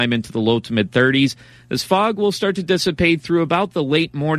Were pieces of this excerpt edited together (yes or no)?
no